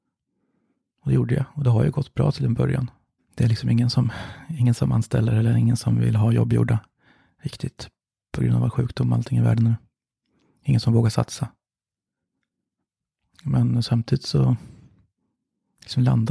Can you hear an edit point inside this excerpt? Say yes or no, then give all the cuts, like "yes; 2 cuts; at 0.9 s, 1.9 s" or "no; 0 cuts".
yes; 1 cut; at 3.2 s